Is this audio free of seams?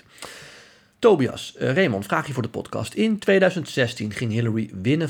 yes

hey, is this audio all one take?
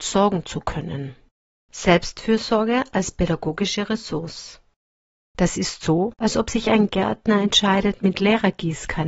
no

